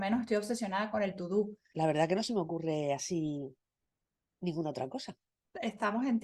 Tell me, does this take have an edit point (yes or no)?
yes